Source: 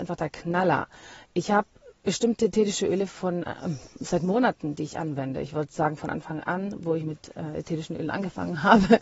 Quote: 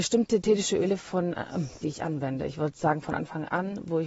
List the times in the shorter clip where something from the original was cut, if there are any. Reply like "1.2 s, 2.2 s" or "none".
1.8 s

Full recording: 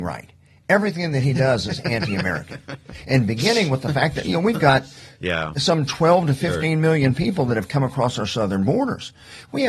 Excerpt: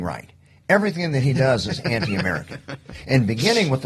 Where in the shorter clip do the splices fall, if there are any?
none

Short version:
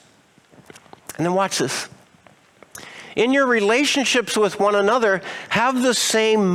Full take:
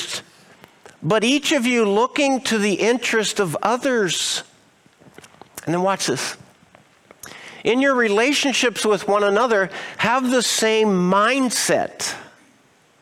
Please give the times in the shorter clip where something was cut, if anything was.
none

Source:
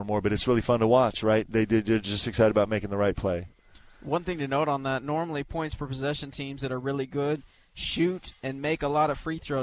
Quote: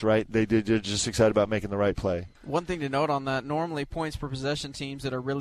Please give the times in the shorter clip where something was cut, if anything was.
2.3 s

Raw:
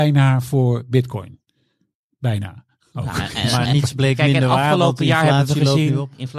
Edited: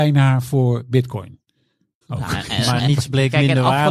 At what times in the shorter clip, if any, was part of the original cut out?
2.0 s

